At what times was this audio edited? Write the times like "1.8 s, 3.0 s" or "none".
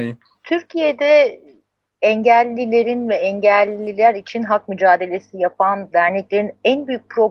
none